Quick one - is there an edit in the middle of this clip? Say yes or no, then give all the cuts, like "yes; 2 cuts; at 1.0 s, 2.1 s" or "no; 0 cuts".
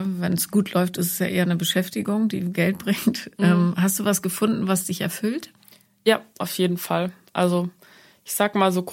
no; 0 cuts